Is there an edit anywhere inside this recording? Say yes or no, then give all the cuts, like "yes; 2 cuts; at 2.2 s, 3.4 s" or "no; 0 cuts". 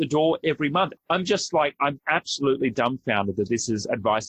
yes; 2 cuts; at 1.0 s, 2.0 s